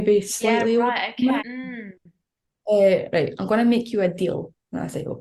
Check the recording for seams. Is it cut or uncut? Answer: cut